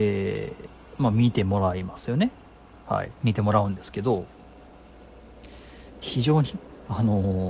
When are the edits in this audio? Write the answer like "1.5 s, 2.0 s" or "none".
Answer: 3.2 s, 6.0 s

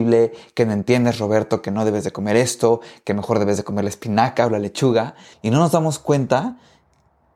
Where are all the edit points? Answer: 5.3 s

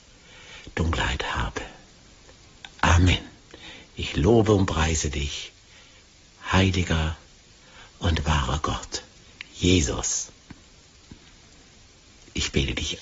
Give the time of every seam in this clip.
none

